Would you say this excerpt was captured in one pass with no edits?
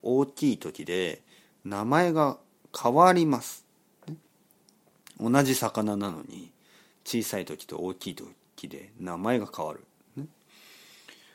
yes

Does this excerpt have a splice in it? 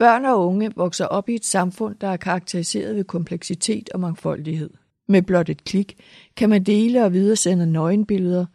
yes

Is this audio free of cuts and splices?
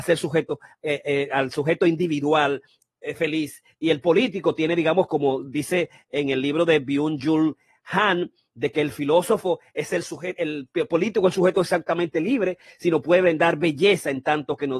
yes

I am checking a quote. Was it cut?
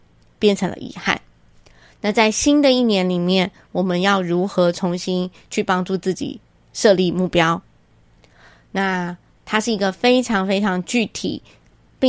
no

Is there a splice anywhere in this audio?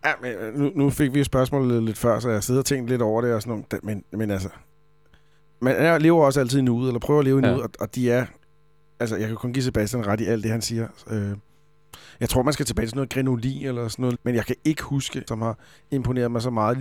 yes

